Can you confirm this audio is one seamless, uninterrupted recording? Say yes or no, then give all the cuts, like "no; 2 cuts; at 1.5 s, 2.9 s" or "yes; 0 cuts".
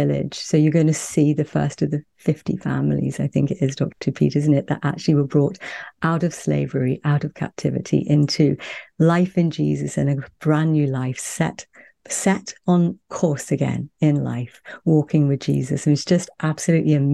yes; 0 cuts